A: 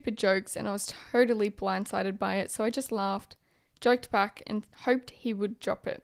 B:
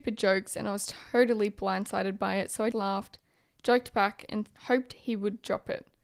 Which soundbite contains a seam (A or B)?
B